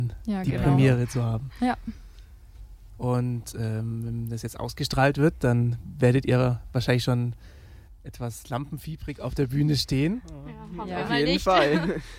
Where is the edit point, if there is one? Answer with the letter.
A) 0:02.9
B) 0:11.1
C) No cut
A